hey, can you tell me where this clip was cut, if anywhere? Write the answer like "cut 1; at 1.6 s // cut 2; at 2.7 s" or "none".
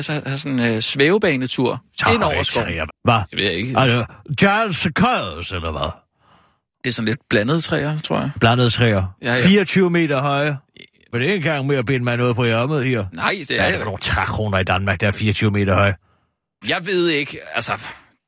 cut 1; at 2.9 s // cut 2; at 11.1 s // cut 3; at 16.6 s

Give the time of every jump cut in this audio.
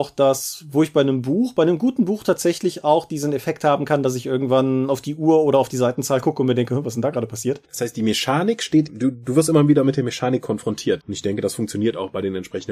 cut 1; at 7.6 s // cut 2; at 11.0 s

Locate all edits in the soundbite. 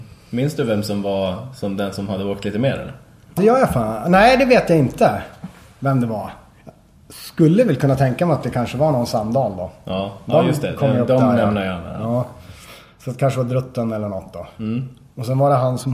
cut 1; at 3.4 s

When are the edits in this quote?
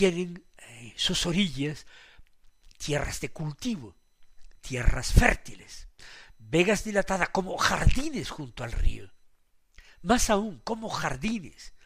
none

